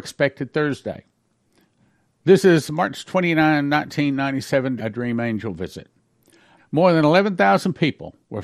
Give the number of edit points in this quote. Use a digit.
3